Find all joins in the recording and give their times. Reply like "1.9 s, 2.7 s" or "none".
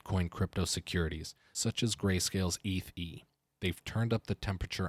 3.5 s